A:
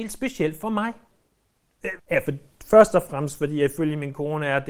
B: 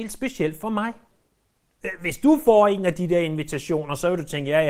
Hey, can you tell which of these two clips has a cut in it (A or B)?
A